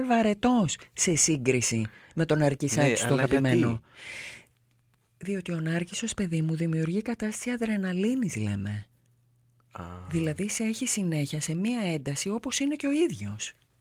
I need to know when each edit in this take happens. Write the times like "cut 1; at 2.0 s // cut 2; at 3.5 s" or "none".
none

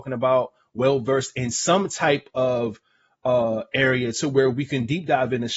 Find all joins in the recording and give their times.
none

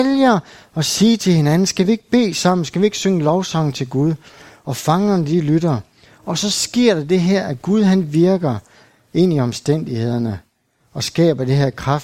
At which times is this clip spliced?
none

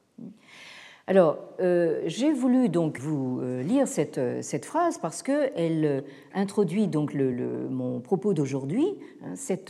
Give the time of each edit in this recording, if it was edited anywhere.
cut 1; at 3.0 s // cut 2; at 7.3 s

